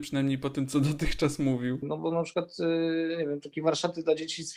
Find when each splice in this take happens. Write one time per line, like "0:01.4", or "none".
0:01.8